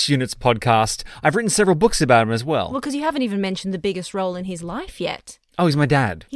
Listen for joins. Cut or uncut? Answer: uncut